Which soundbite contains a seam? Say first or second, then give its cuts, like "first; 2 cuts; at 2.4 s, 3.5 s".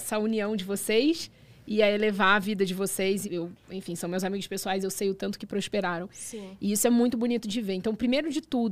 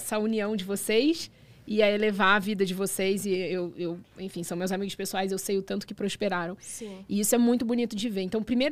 first; 1 cut; at 3.2 s